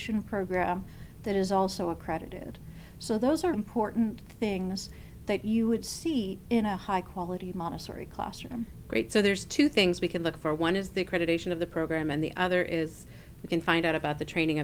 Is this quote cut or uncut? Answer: cut